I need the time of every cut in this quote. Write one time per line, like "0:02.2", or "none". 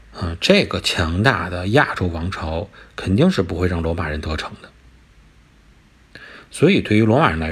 none